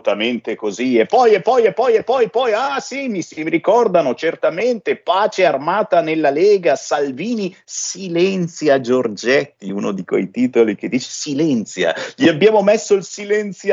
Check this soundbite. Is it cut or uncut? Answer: uncut